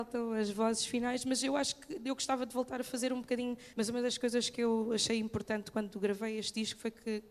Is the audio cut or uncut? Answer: cut